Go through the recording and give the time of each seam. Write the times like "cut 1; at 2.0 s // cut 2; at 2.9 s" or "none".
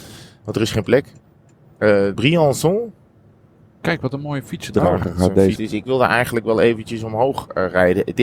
cut 1; at 2.1 s // cut 2; at 5.6 s

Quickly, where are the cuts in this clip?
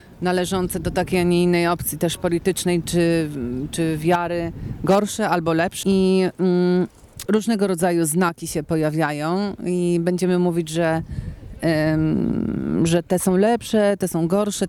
cut 1; at 5.8 s // cut 2; at 7.3 s

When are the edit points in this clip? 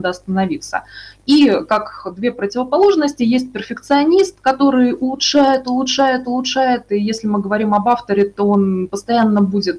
none

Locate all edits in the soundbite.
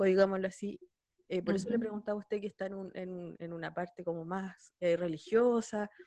none

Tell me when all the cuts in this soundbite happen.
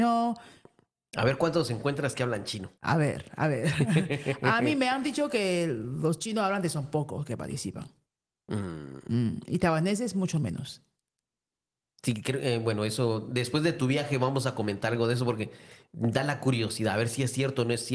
cut 1; at 2.7 s

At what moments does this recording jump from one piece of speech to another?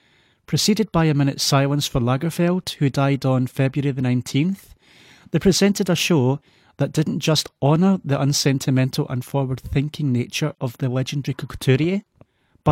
none

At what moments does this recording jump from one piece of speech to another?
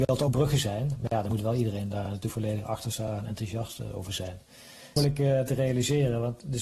cut 1; at 5.0 s

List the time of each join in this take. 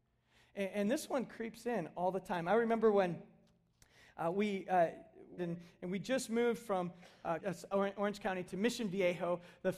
cut 1; at 5.4 s // cut 2; at 7.4 s // cut 3; at 8.5 s

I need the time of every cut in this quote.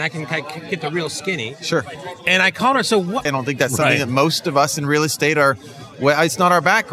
cut 1; at 3.3 s

